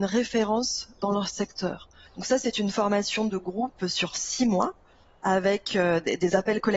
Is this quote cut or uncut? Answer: cut